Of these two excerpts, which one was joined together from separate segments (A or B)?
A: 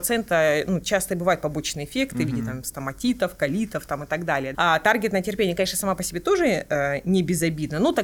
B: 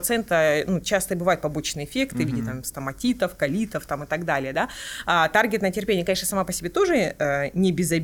A